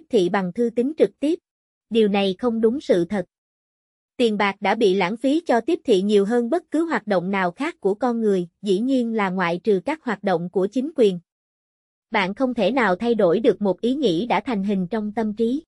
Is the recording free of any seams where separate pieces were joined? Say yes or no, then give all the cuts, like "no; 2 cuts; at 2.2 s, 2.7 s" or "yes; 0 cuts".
no; 1 cut; at 1.7 s